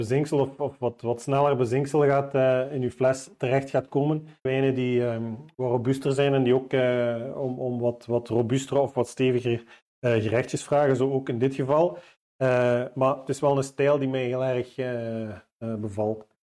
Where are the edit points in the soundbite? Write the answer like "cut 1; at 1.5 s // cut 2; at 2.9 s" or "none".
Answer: cut 1; at 4.5 s